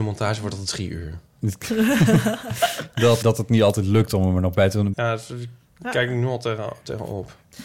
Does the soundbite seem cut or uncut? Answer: cut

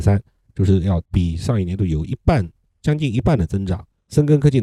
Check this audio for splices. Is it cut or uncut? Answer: cut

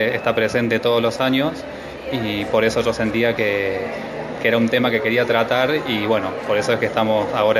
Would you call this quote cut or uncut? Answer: uncut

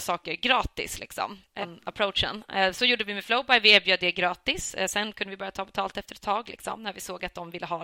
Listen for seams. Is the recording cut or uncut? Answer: cut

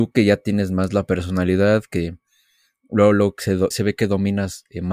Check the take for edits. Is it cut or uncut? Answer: cut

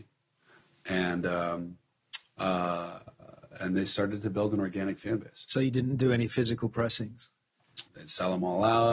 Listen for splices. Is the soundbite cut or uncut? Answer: cut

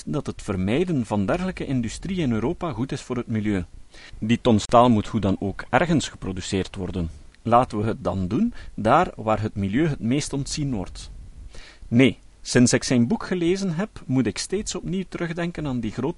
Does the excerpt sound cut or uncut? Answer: uncut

